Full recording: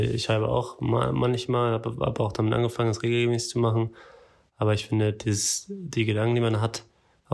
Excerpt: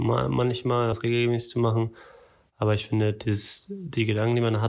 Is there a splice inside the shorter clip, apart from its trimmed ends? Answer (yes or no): yes